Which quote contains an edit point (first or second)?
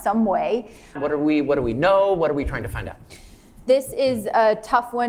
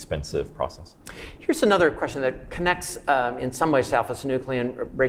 first